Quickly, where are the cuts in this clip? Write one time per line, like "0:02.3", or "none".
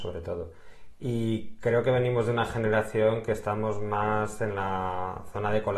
none